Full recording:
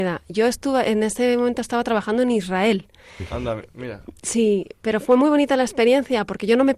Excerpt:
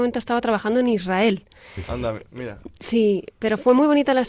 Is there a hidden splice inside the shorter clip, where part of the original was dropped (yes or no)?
no